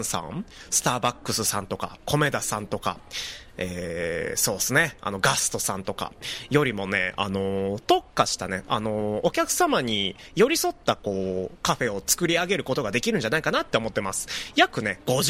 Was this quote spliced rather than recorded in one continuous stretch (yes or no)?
no